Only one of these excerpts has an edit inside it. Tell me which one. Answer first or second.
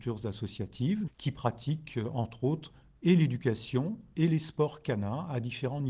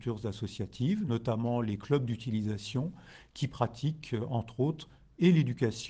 first